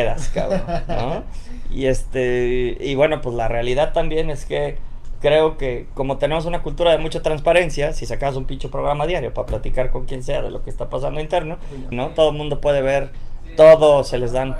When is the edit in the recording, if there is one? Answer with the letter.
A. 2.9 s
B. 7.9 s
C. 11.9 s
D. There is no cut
C